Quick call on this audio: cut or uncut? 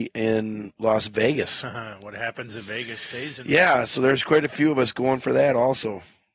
uncut